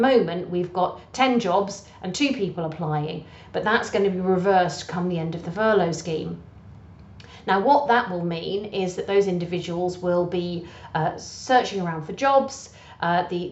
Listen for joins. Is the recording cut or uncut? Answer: uncut